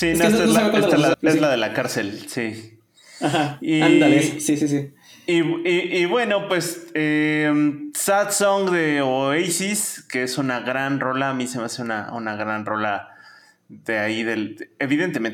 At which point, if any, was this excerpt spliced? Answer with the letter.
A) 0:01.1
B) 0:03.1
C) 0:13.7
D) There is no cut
A